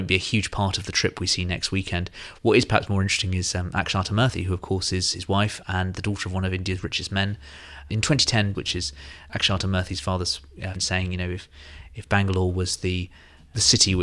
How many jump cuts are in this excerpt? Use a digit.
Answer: 2